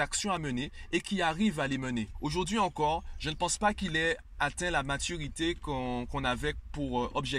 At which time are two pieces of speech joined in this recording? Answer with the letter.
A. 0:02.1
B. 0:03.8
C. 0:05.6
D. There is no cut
A